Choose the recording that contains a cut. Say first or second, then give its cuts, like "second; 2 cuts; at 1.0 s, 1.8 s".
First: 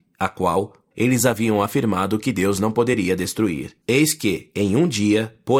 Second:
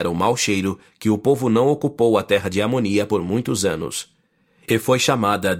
first; 2 cuts; at 0.9 s, 3.8 s